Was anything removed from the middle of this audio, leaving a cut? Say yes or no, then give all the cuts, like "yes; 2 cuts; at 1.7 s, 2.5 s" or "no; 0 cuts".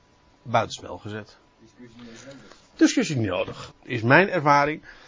yes; 1 cut; at 3.7 s